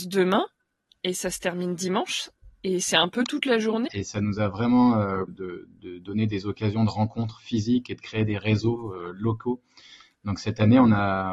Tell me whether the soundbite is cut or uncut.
cut